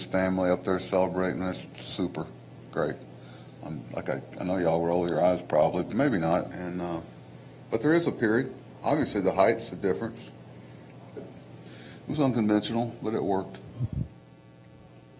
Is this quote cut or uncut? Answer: cut